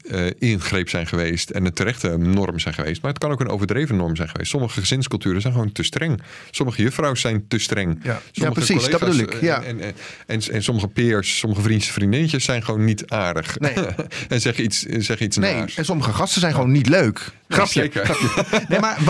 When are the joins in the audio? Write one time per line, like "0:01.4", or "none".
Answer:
none